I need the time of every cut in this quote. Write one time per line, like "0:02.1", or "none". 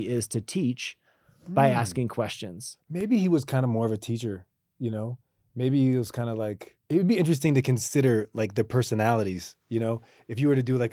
0:06.8